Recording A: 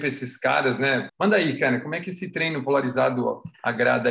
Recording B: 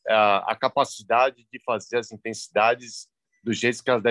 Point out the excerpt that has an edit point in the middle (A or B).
A